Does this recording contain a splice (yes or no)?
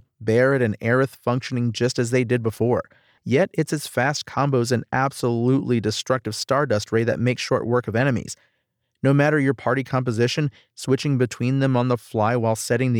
yes